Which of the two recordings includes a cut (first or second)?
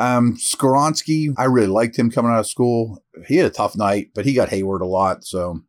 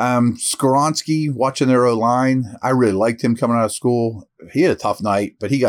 first